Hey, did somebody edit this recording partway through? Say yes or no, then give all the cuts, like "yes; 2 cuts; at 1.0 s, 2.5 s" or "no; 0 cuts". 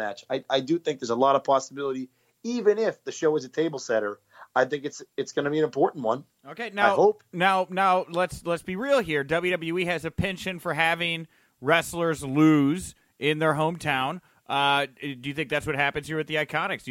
no; 0 cuts